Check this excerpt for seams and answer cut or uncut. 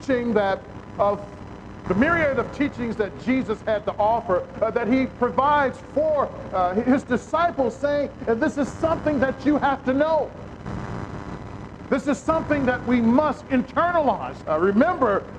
cut